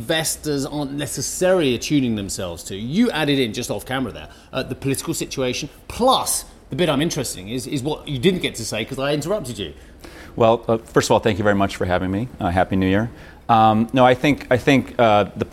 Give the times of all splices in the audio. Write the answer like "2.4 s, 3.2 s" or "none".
none